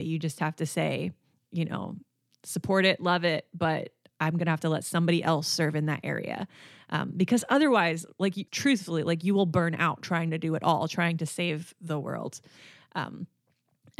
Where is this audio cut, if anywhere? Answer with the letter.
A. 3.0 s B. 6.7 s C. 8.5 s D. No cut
C